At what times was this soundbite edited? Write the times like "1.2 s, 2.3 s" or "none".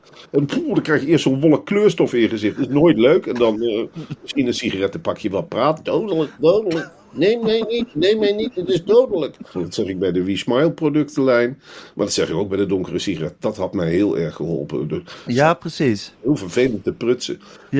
9.5 s, 15.3 s